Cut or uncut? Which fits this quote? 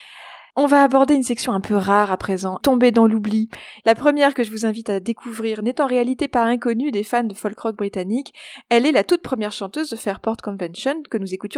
cut